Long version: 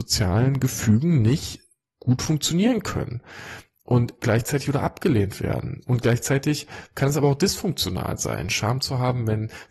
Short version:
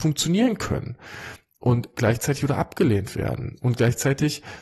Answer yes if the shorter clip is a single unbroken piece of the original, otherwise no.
yes